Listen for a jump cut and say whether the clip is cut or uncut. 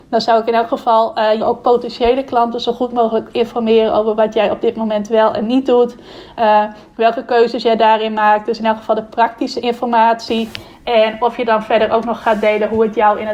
cut